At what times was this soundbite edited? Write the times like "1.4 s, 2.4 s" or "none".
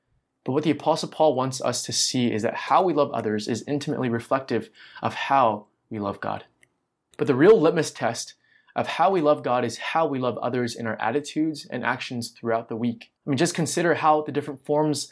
7.1 s, 13.2 s